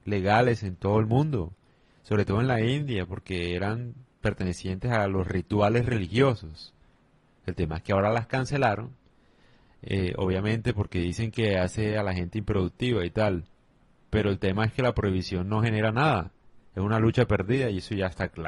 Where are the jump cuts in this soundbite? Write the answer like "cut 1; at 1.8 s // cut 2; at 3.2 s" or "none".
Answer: none